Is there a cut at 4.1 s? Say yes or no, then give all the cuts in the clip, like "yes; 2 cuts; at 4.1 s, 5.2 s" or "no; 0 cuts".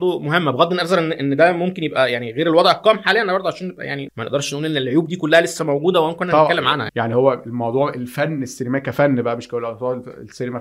yes; 2 cuts; at 4.1 s, 6.9 s